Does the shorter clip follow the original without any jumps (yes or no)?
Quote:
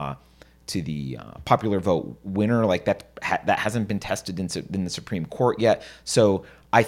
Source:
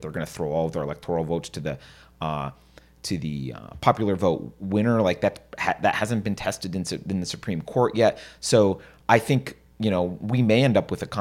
yes